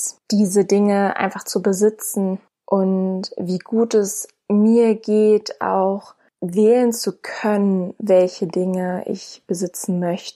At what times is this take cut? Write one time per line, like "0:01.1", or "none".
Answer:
none